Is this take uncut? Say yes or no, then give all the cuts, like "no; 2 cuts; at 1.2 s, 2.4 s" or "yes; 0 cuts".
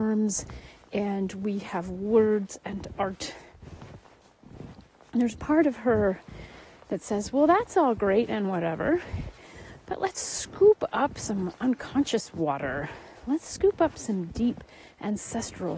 yes; 0 cuts